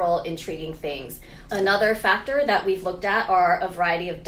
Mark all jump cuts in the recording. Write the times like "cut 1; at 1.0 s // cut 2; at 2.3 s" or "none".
cut 1; at 1.5 s